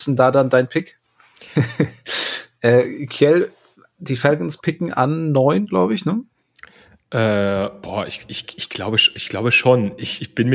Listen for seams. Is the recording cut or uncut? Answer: cut